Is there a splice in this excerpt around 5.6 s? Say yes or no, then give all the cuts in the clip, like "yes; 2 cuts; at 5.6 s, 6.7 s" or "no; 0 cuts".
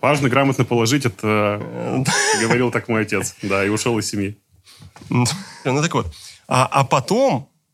yes; 1 cut; at 5.6 s